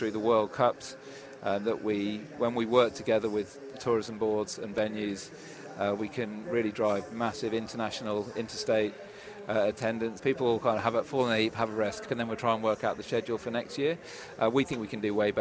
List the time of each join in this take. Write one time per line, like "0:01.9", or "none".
0:10.2
0:12.0